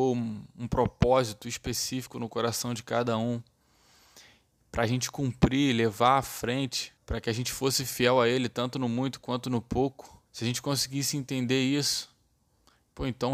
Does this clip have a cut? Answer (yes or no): yes